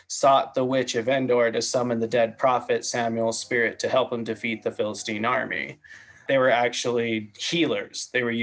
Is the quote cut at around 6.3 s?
yes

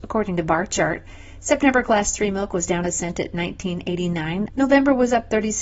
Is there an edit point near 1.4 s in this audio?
no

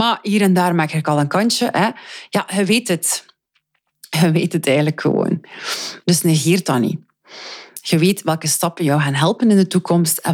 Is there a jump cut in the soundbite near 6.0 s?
yes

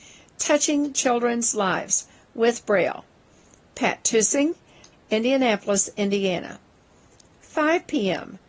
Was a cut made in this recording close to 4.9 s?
yes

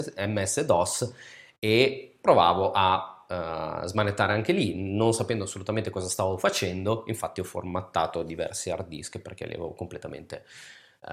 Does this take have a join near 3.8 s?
no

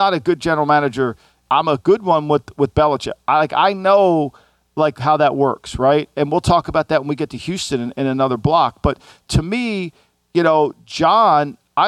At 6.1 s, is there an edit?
no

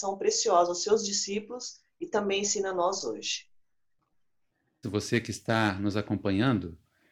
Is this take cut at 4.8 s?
yes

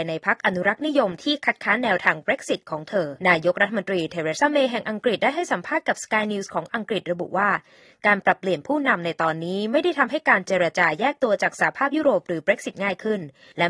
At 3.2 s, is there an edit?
yes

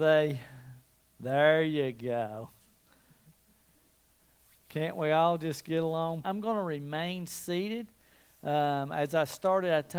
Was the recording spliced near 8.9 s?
no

